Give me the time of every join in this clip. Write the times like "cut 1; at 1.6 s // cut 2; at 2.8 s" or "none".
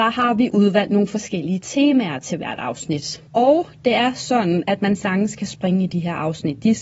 cut 1; at 3.3 s